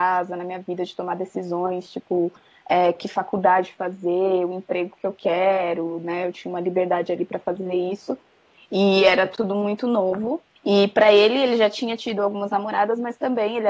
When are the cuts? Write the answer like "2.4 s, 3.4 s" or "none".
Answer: 8.5 s, 10.6 s